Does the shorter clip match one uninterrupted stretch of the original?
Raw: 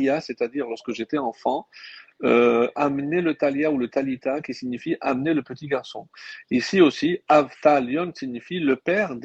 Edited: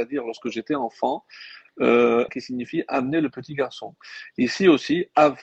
no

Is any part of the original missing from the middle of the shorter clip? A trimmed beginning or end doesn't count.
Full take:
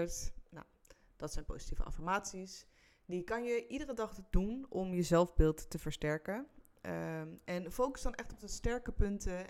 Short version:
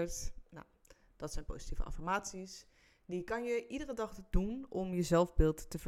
no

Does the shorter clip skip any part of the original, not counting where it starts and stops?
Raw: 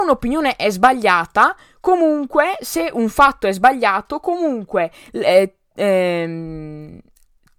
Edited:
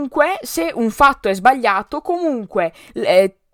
no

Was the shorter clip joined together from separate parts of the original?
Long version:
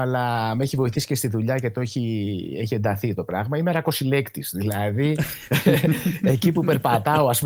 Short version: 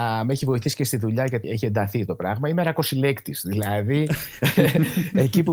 yes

